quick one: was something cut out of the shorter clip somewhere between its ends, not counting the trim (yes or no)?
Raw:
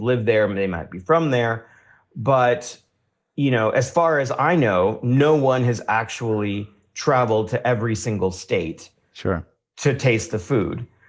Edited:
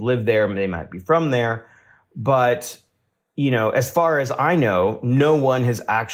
no